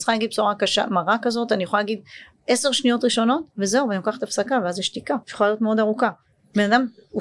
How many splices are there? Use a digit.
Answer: 1